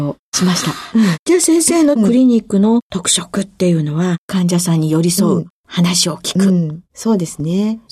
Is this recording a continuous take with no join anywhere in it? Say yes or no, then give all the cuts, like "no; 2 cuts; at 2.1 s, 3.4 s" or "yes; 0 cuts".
yes; 0 cuts